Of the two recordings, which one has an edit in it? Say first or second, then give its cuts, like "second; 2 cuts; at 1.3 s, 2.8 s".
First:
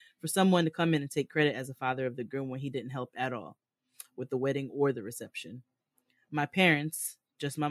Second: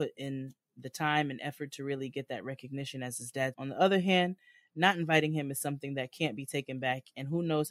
second; 1 cut; at 3.5 s